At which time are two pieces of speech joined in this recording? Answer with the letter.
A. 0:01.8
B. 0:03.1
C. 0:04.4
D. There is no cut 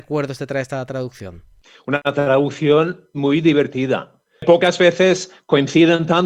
B